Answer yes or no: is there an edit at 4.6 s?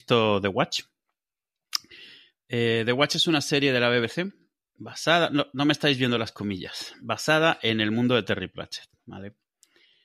yes